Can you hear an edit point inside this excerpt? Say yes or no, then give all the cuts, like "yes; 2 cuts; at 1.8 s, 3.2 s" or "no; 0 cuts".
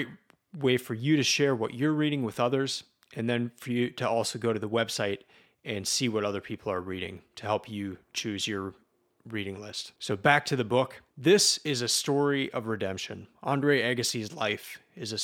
yes; 2 cuts; at 10.0 s, 11.1 s